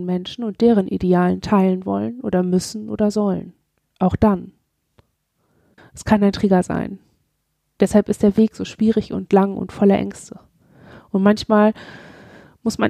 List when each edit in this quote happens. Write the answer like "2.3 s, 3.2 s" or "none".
5.8 s

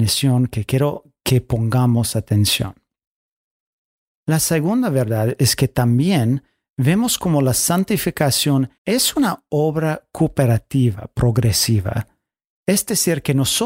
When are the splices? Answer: 4.2 s, 8.8 s

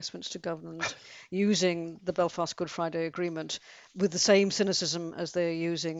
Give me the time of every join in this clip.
none

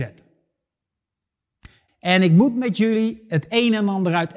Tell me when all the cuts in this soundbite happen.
1.9 s

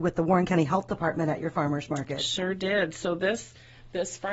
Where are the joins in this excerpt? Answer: none

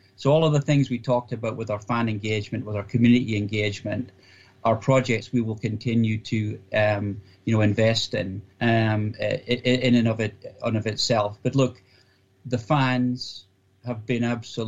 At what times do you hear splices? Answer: 8.5 s

